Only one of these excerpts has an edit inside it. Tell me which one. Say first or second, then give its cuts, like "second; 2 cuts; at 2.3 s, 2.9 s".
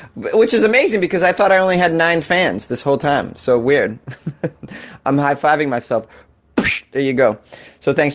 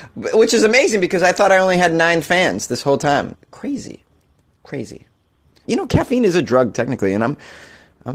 second; 2 cuts; at 3.3 s, 5.6 s